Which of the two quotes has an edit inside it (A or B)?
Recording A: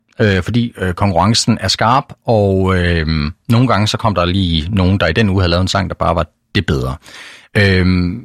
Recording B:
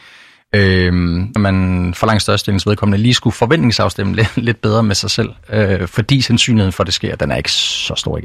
B